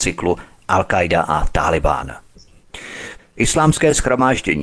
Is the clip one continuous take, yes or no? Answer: no